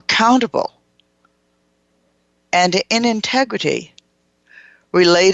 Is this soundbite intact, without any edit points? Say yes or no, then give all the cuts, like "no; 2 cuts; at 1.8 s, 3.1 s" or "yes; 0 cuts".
yes; 0 cuts